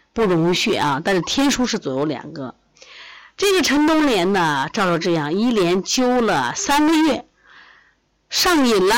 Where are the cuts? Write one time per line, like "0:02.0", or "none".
none